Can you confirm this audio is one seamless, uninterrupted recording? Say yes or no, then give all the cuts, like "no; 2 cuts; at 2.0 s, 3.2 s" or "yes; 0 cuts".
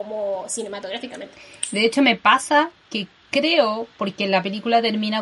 yes; 0 cuts